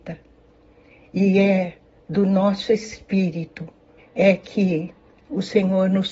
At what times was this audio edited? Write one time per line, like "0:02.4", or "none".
0:04.0